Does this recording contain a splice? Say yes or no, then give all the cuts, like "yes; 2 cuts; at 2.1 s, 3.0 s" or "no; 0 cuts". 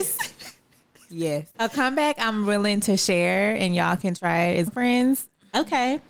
yes; 2 cuts; at 1.5 s, 4.7 s